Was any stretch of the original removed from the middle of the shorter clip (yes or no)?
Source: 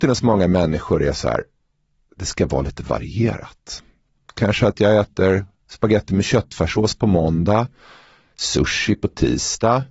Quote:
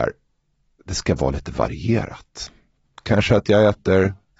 no